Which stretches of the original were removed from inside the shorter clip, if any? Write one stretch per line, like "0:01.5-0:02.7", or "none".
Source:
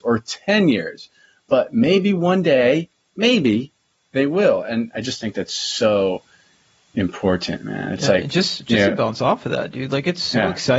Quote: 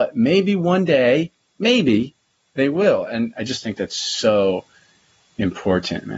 none

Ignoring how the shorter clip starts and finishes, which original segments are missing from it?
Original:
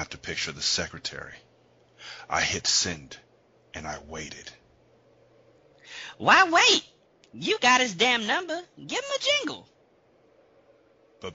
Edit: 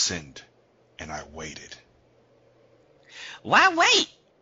none

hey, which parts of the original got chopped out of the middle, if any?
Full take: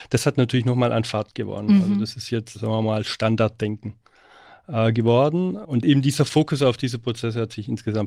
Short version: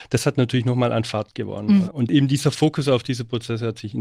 0:01.8-0:05.6

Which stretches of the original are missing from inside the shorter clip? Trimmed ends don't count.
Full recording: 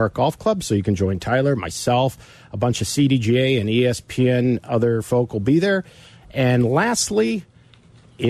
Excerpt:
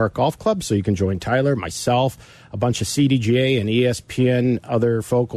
none

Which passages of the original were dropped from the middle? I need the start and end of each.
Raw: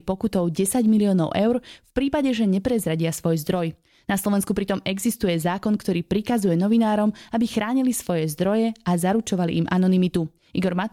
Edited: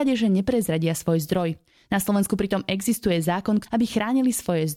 0:05.8-0:07.3

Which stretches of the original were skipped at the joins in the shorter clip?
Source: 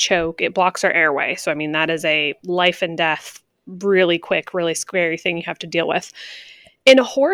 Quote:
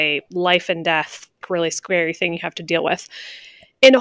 0:03.5-0:04.5

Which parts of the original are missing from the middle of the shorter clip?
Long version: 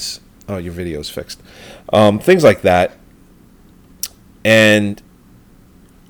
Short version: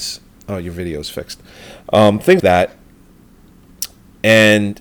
0:02.4-0:02.6

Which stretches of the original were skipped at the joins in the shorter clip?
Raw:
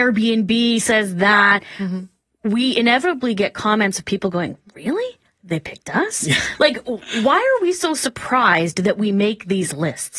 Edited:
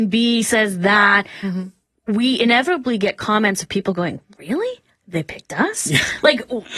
none

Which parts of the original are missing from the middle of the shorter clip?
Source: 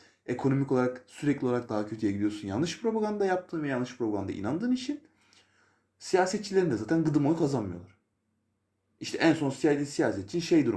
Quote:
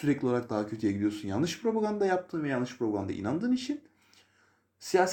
none

